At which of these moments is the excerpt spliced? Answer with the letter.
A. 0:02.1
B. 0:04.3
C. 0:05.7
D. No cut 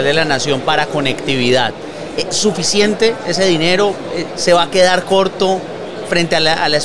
B